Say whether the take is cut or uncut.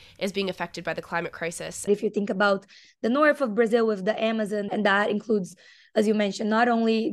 cut